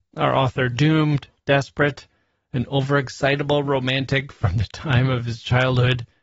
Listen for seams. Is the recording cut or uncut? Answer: uncut